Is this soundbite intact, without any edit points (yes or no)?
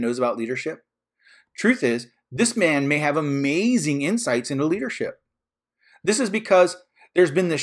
yes